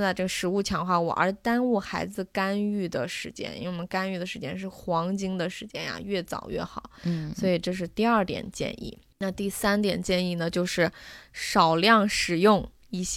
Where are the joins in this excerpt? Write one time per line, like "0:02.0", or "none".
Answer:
none